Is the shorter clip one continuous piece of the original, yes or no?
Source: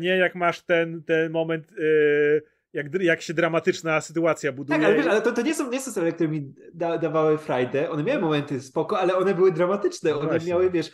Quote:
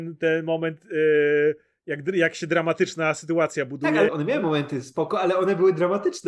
no